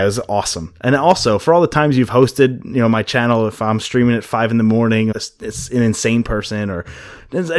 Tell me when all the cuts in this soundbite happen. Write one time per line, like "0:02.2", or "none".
0:05.1